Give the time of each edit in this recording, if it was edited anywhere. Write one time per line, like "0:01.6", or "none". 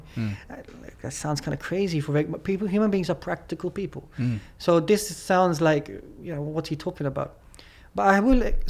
none